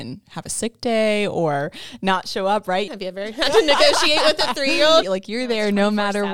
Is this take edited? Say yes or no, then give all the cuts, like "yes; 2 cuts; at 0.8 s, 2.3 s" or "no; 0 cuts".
yes; 2 cuts; at 2.9 s, 5.0 s